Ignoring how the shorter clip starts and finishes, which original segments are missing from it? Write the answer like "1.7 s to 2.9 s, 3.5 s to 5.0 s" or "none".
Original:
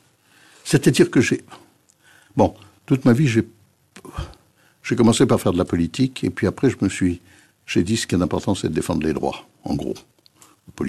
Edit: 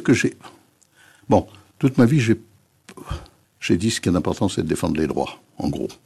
4.5 s to 7.5 s